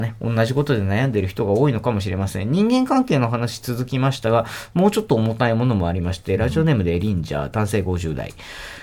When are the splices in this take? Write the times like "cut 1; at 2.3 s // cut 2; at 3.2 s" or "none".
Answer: none